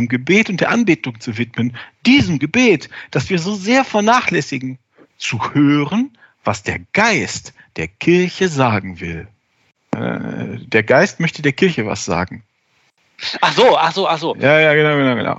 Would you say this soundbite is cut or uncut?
cut